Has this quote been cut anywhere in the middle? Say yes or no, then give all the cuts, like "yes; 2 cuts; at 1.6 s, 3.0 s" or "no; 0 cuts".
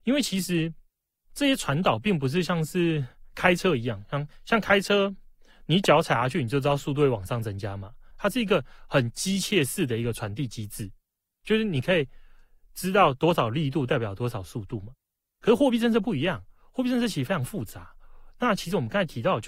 yes; 1 cut; at 8.1 s